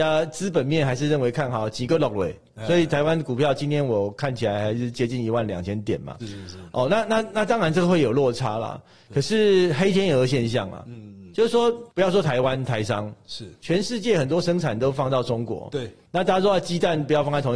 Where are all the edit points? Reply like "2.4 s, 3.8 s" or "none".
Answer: 6.2 s